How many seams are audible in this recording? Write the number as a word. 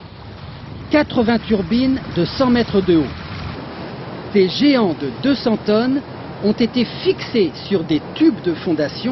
one